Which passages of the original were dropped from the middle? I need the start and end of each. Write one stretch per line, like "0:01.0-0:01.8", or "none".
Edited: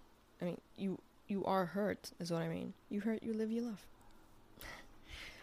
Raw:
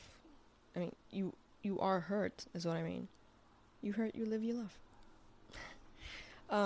0:03.1-0:03.7